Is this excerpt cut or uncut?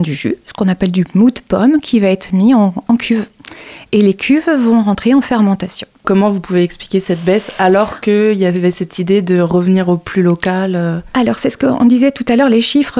cut